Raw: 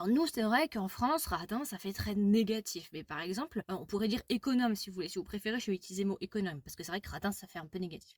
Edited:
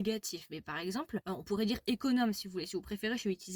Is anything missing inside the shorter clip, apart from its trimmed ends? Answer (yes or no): no